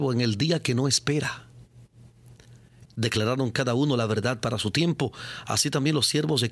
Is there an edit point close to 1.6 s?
no; 1 cut; at 2.9 s

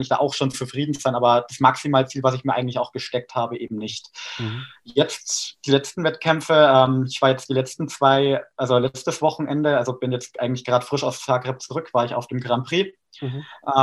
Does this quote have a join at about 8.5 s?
no; 0 cuts

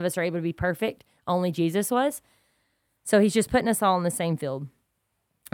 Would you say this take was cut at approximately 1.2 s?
no; 0 cuts

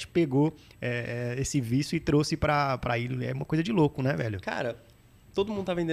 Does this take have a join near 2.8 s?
yes; 1 cut; at 2.8 s

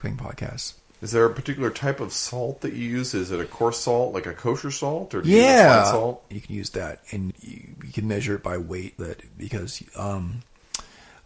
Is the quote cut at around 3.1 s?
no; 3 cuts; at 6.3 s, 7.3 s, 9.0 s

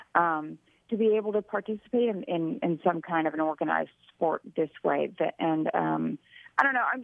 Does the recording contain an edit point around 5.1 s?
no; 0 cuts

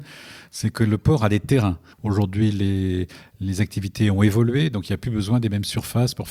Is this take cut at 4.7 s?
no; 1 cut; at 1.9 s

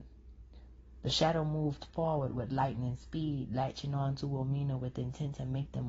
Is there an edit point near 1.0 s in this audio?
no; 0 cuts

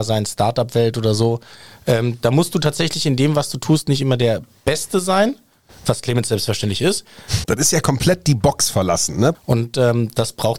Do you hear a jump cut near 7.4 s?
yes; 2 cuts; at 7.4 s, 9.3 s

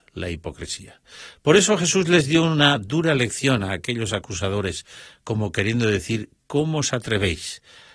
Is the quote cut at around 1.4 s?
no; 0 cuts

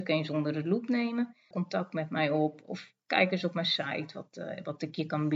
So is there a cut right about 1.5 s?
yes; 1 cut; at 1.5 s

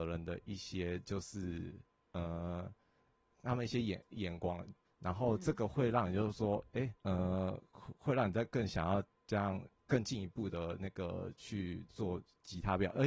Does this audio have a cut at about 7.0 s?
yes; 2 cuts; at 4.8 s, 7.0 s

